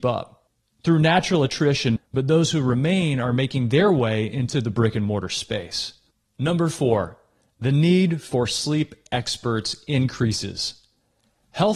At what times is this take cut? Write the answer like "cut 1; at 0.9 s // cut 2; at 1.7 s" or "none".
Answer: cut 1; at 2.0 s // cut 2; at 6.3 s